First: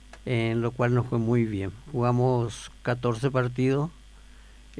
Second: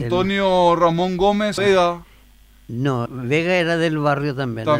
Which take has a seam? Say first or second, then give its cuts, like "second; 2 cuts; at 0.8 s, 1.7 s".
second; 2 cuts; at 1.6 s, 3.1 s